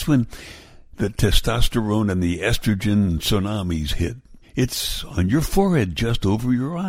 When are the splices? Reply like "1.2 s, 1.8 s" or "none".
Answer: 4.4 s